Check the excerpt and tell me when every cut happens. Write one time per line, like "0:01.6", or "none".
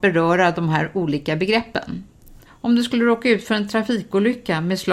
0:02.4